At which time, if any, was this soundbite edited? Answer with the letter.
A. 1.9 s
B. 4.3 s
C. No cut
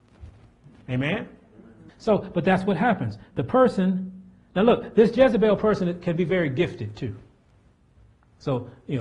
A